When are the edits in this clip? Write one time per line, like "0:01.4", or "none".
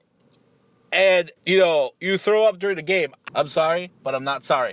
0:01.4
0:03.3